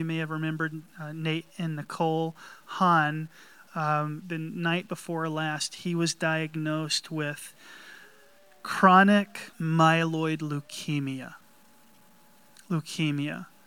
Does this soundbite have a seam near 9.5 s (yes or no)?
yes